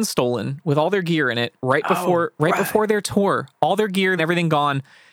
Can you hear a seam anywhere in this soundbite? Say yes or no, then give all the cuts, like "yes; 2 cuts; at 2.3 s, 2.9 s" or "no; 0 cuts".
yes; 1 cut; at 4.2 s